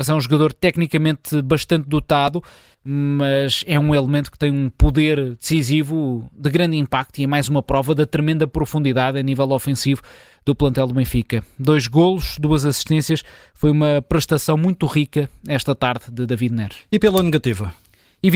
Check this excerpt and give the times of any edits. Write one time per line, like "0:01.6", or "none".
0:02.7

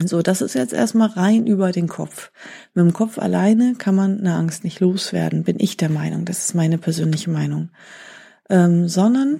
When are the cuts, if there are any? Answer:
none

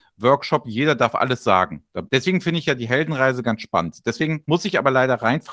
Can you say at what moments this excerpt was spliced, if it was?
0:02.1

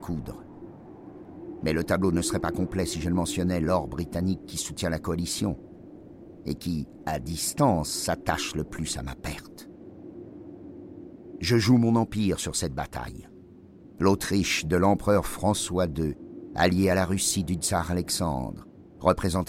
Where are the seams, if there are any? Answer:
0:14.0

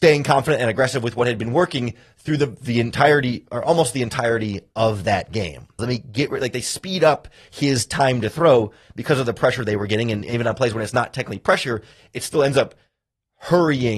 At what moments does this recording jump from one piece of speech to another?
0:05.8

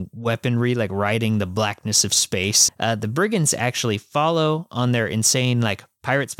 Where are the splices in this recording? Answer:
0:02.7

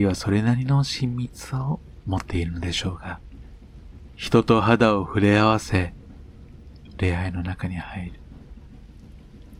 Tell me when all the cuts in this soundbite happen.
0:04.1
0:07.0

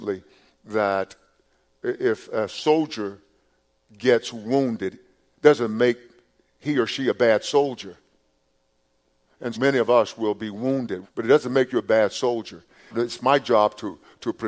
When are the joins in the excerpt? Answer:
0:09.5
0:11.0
0:12.9

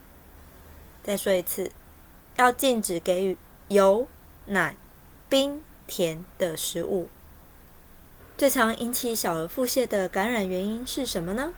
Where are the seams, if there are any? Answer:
0:01.0

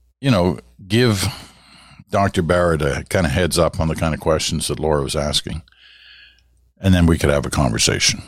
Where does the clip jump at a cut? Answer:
none

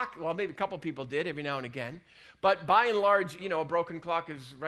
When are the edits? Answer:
0:03.4

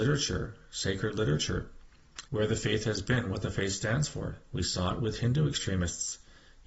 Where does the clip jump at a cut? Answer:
0:02.3

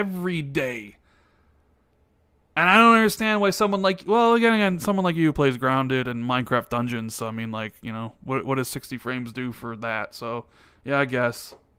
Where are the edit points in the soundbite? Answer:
none

